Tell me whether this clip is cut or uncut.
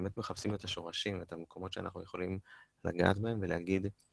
uncut